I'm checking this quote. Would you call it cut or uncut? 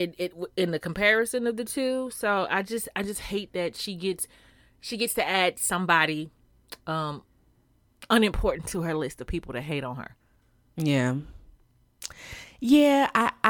uncut